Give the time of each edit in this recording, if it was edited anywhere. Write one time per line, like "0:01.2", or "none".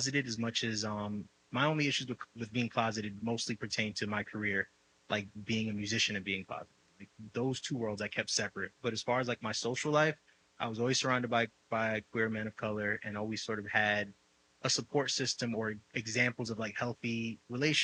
none

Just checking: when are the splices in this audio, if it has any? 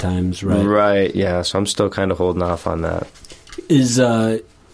none

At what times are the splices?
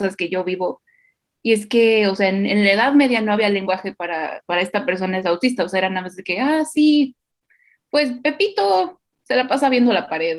none

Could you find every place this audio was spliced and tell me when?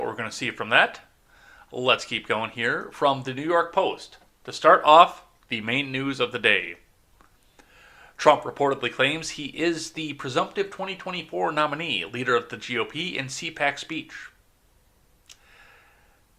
none

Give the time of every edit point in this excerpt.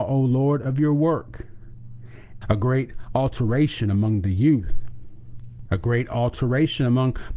0:02.4
0:05.7

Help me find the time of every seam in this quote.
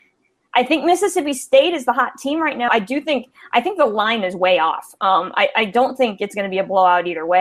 0:02.7

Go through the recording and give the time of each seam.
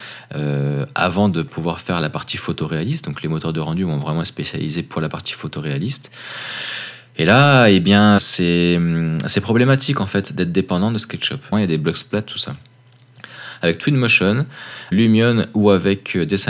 0:08.2
0:11.5
0:14.9

